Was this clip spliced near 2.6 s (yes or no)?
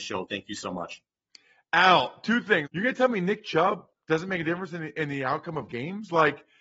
yes